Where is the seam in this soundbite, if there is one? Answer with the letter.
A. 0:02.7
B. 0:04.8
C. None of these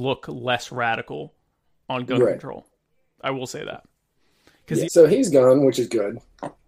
B